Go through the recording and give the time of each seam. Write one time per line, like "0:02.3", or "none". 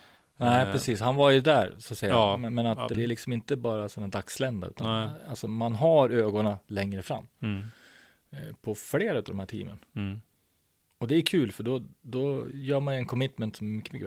0:02.9